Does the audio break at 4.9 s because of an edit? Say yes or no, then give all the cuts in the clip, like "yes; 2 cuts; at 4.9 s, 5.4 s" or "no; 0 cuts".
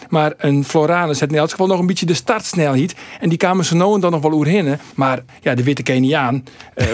yes; 1 cut; at 4.9 s